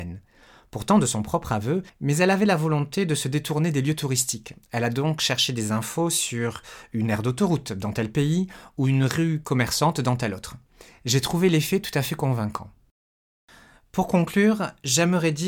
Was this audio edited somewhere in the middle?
yes; 1 cut; at 1.9 s

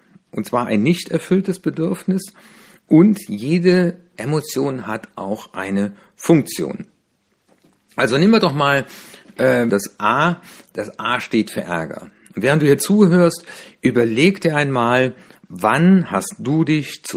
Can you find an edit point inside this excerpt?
yes; 1 cut; at 9.7 s

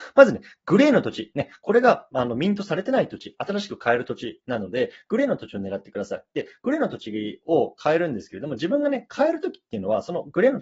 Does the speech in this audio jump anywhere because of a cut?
no; 0 cuts

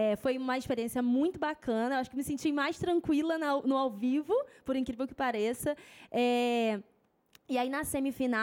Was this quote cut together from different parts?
no; 0 cuts

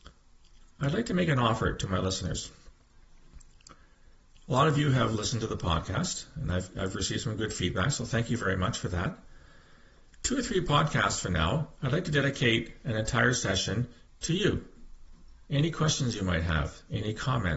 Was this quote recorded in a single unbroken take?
yes; 0 cuts

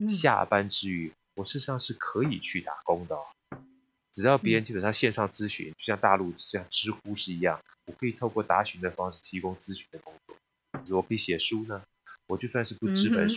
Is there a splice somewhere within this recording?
yes; 1 cut; at 10.9 s

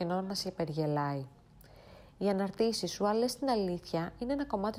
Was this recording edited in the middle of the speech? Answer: no; 0 cuts

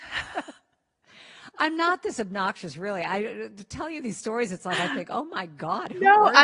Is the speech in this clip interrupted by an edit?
no; 0 cuts

